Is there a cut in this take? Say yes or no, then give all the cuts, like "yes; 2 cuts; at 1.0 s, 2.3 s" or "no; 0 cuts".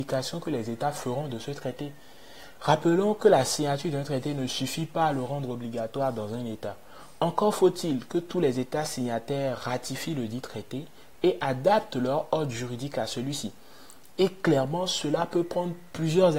no; 0 cuts